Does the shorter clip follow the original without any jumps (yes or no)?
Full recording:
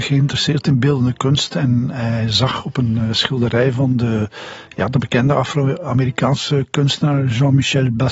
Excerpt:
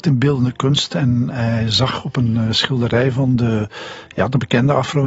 yes